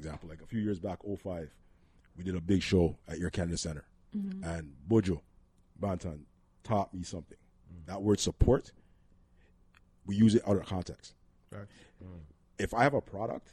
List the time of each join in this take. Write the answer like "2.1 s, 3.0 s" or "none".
none